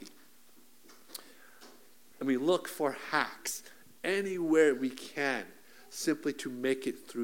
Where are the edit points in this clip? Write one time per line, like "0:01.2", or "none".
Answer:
0:02.1